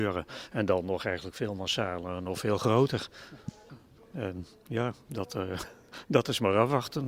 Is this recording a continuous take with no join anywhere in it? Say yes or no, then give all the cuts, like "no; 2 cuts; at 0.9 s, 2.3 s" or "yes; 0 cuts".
no; 1 cut; at 4.0 s